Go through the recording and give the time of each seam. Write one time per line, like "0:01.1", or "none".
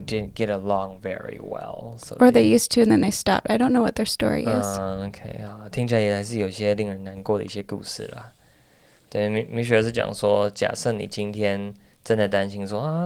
none

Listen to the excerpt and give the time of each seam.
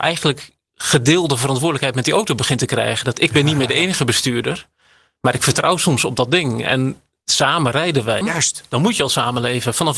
0:08.2

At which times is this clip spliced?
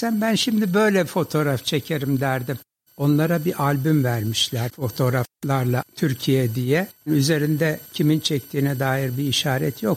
0:02.9

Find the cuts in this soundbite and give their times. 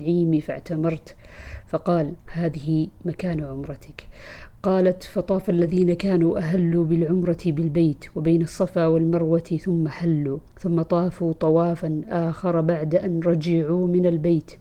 0:02.2
0:10.5

